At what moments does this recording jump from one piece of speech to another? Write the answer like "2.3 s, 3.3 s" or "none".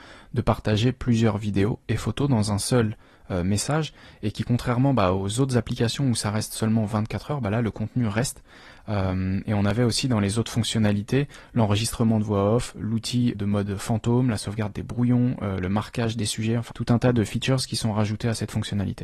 13.3 s, 16.7 s